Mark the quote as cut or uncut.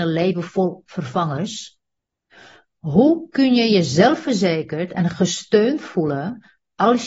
cut